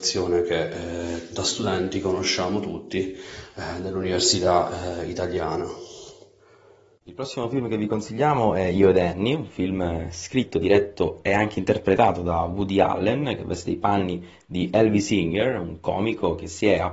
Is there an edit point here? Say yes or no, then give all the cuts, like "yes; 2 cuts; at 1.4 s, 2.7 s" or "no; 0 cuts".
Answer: no; 0 cuts